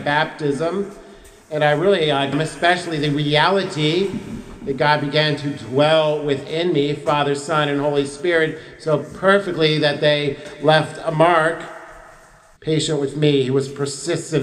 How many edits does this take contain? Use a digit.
2